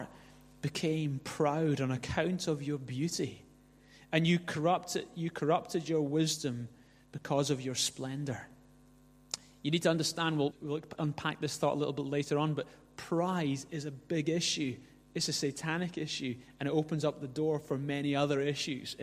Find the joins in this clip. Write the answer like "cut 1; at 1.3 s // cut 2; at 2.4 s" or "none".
cut 1; at 10.5 s